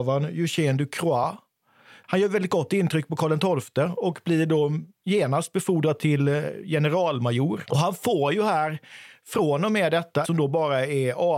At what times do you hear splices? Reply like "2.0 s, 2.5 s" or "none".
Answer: 7.6 s, 10.2 s